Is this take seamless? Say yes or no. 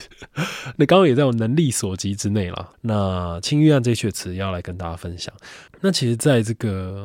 no